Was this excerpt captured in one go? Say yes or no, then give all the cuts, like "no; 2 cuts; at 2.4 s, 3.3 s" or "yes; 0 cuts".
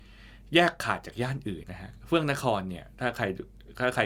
no; 1 cut; at 1.6 s